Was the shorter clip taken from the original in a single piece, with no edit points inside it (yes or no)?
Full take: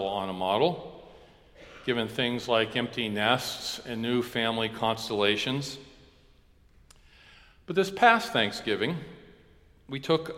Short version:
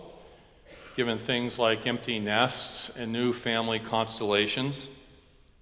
yes